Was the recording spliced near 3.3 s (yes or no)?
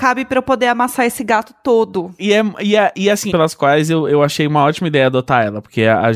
yes